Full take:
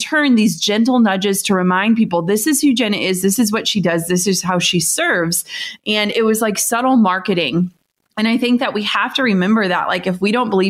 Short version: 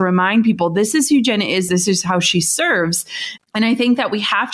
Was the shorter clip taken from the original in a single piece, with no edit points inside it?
no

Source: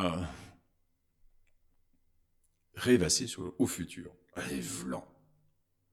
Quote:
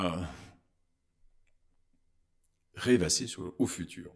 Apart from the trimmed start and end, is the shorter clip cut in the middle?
no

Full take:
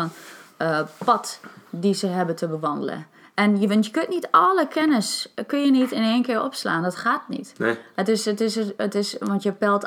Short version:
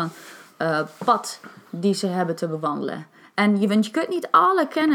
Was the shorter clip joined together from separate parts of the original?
no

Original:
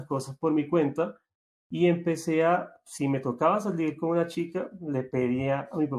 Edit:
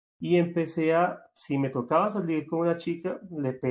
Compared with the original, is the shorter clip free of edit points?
yes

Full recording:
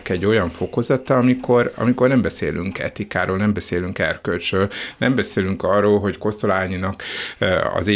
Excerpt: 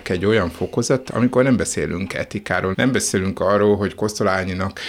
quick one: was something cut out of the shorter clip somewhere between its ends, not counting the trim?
yes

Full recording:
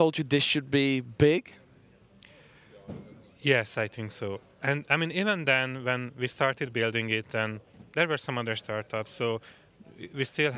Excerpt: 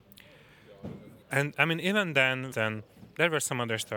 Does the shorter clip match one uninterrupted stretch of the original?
no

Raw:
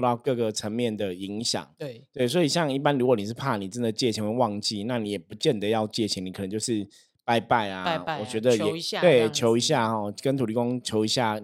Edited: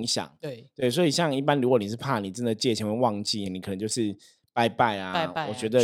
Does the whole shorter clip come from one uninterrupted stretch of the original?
no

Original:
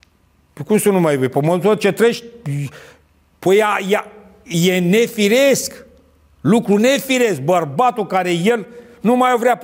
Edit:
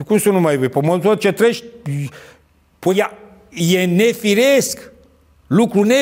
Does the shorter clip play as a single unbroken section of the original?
no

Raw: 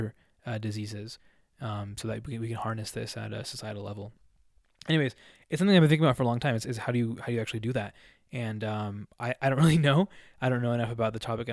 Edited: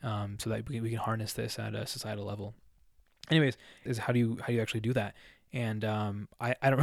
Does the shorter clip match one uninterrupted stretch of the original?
no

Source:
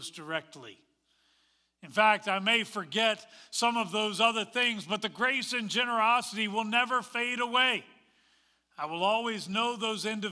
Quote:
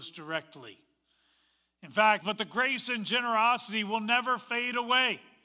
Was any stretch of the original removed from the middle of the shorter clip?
yes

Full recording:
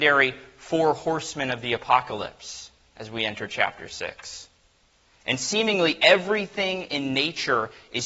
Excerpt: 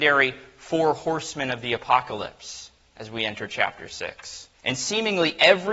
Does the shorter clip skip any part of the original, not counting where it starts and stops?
yes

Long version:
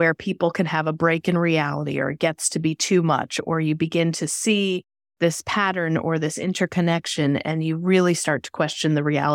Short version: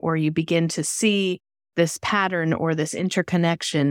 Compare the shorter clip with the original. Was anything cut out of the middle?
no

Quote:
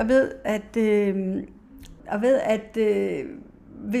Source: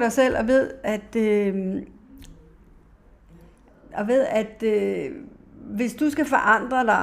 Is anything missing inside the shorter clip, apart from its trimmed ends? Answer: yes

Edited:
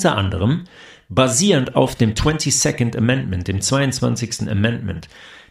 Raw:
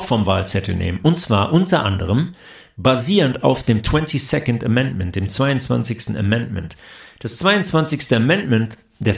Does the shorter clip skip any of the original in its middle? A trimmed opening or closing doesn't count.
no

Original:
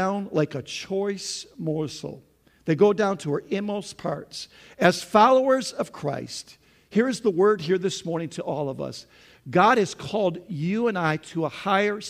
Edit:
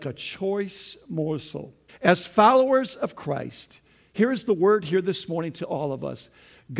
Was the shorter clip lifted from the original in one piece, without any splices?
no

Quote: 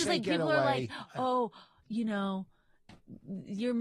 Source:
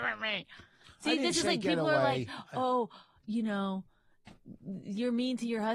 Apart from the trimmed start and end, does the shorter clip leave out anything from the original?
no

